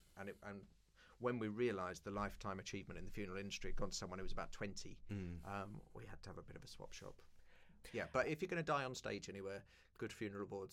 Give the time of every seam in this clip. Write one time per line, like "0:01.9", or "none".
0:07.8